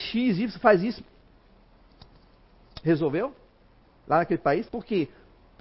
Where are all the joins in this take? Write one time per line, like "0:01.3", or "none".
0:04.7